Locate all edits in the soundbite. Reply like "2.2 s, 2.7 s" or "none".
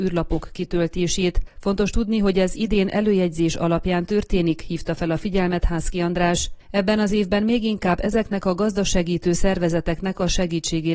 none